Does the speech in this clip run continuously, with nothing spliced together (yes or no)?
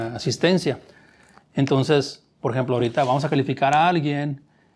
yes